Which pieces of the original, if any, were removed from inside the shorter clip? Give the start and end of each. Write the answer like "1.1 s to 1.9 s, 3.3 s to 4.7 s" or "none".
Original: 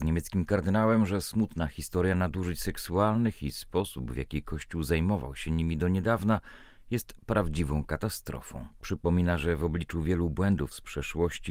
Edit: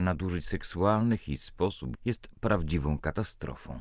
4.1 s to 6.8 s